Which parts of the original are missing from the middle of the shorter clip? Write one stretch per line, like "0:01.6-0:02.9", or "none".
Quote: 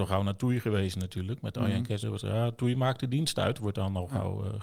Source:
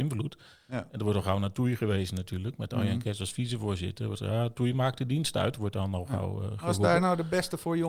0:03.2-0:04.0